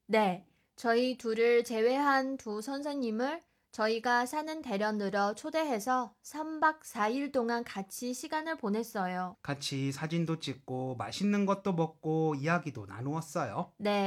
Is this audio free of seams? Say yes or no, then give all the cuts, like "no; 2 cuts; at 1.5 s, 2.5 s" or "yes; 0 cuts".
no; 1 cut; at 9.3 s